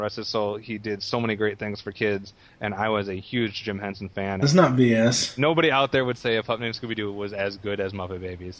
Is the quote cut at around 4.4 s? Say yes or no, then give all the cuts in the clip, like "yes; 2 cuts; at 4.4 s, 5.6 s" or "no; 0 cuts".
yes; 1 cut; at 4.4 s